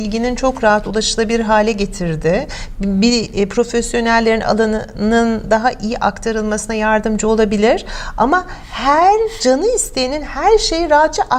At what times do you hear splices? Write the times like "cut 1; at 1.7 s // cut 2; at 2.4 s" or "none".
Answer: none